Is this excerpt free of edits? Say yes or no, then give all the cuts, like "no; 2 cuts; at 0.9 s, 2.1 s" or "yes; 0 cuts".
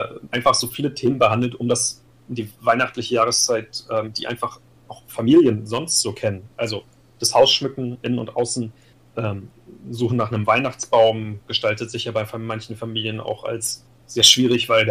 yes; 0 cuts